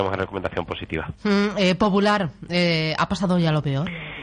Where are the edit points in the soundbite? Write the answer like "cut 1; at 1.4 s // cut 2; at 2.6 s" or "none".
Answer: none